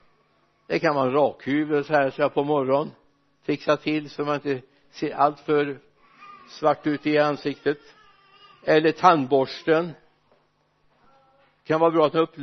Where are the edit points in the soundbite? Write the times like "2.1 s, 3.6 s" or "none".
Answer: none